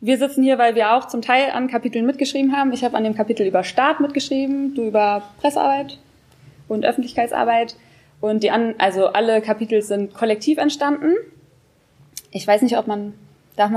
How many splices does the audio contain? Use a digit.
0